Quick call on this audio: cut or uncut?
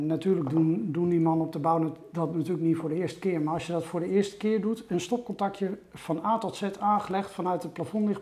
uncut